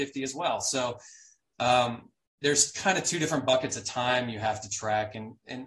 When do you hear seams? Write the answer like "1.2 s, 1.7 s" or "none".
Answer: none